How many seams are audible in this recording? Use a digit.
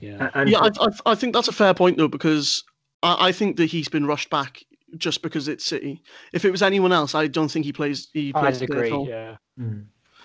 0